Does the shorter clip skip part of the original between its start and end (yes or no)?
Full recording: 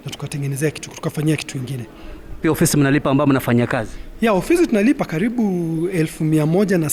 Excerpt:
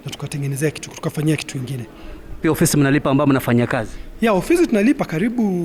no